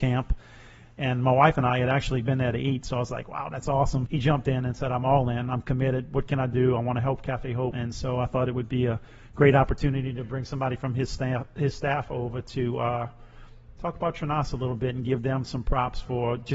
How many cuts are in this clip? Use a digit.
2